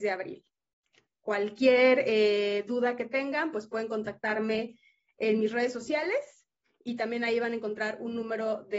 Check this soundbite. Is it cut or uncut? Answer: uncut